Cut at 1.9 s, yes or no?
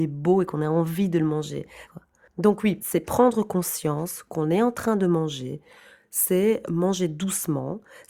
yes